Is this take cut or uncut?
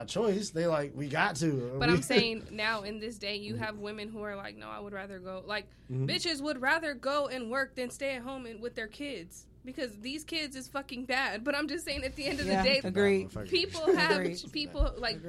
cut